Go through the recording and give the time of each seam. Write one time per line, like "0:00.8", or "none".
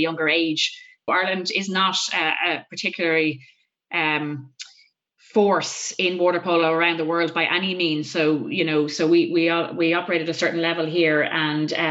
0:01.1